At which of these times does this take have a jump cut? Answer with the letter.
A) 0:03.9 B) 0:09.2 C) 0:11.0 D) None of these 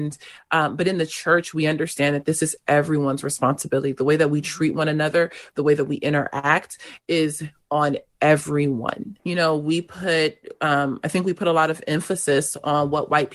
B